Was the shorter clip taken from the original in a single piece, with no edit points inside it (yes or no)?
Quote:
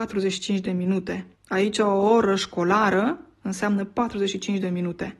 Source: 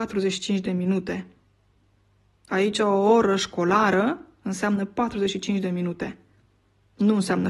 no